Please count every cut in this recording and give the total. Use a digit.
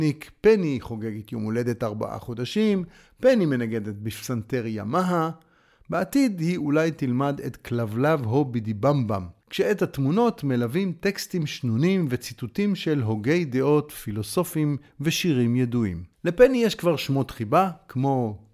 2